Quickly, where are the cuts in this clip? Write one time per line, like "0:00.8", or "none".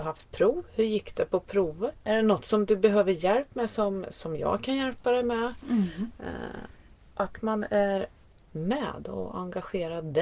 none